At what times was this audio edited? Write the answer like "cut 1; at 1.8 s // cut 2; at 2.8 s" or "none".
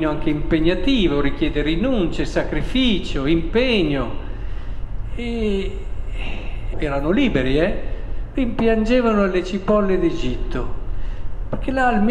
cut 1; at 6.7 s // cut 2; at 8.3 s